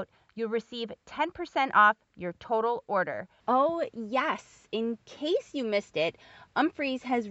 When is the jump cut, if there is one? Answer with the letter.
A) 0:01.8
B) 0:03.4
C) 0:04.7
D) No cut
B